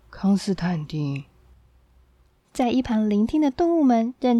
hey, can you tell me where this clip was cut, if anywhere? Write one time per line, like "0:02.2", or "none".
0:02.4